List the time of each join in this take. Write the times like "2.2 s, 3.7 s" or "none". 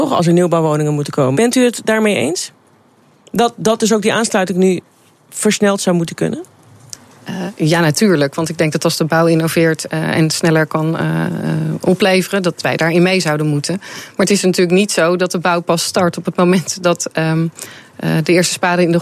1.3 s